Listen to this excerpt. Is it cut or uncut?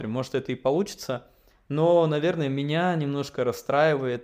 uncut